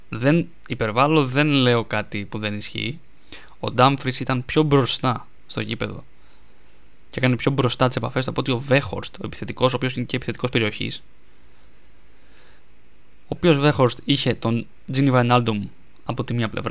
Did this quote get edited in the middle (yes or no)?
no